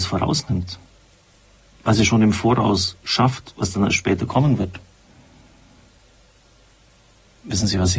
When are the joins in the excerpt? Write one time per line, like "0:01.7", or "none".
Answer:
none